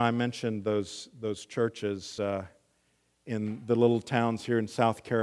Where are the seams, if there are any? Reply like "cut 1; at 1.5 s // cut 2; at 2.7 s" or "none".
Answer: none

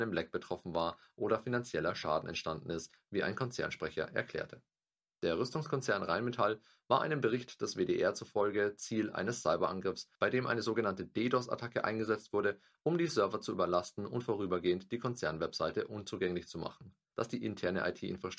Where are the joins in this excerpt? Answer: cut 1; at 5.0 s // cut 2; at 17.1 s

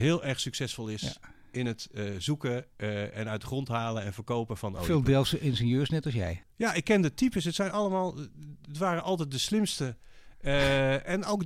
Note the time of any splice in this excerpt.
cut 1; at 6.4 s

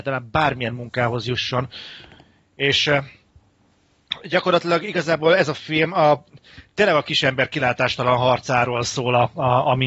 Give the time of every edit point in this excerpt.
none

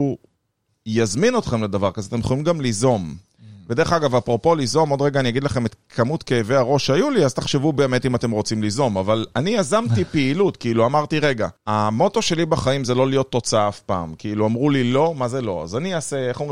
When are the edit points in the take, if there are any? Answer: cut 1; at 11.6 s

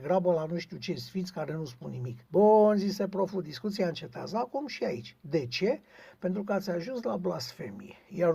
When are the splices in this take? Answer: cut 1; at 2.2 s

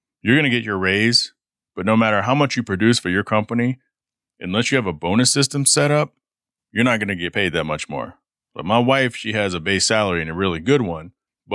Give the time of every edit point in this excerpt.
none

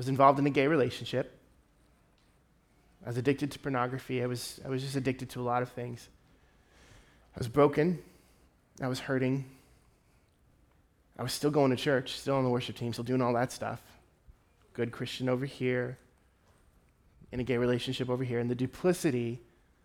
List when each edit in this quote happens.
cut 1; at 13.0 s

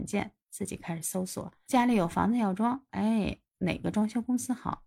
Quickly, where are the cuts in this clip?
cut 1; at 2.9 s

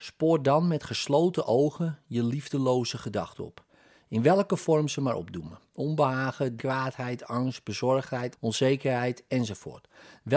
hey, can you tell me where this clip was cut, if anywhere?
cut 1; at 6.6 s // cut 2; at 8.3 s

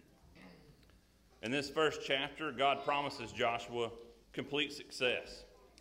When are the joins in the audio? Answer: cut 1; at 1.3 s // cut 2; at 4.2 s

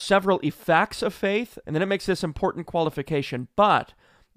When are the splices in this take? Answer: cut 1; at 1.6 s

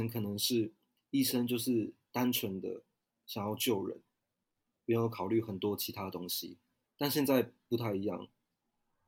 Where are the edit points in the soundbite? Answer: none

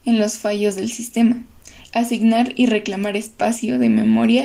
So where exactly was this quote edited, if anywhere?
cut 1; at 1.8 s

